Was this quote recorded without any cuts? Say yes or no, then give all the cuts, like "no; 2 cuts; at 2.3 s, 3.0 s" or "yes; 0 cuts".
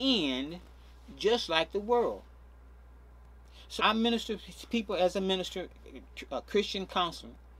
no; 1 cut; at 3.8 s